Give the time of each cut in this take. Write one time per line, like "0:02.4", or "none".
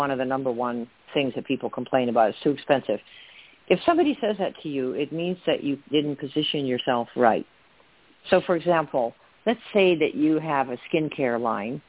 0:05.9

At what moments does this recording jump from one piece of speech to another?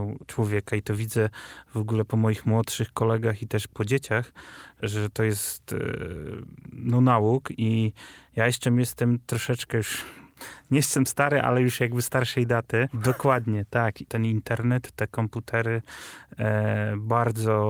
0:12.9
0:14.1

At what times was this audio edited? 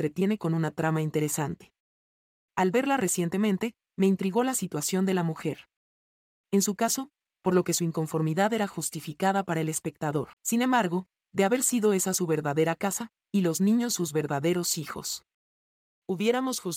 0:07.4
0:10.3
0:13.2

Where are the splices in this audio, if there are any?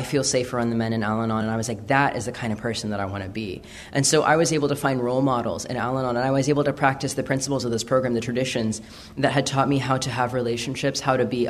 none

